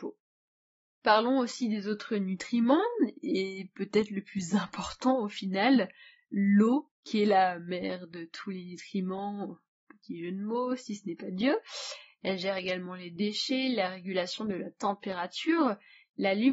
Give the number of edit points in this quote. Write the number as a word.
one